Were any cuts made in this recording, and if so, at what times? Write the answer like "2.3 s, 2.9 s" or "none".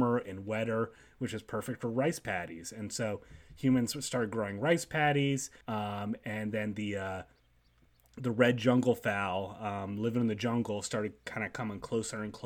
5.6 s